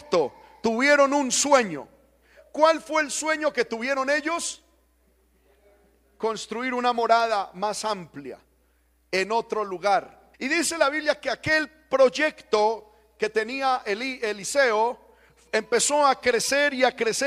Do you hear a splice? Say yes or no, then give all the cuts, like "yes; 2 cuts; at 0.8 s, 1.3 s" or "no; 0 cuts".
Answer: yes; 1 cut; at 10.3 s